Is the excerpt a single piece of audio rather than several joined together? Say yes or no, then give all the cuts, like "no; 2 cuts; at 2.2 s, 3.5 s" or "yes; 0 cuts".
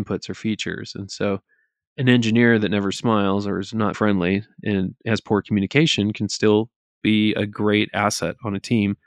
no; 1 cut; at 3.9 s